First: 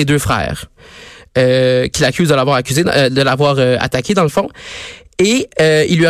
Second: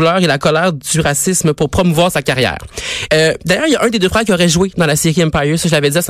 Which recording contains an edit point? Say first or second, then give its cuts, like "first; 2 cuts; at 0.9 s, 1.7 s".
second; 1 cut; at 3.1 s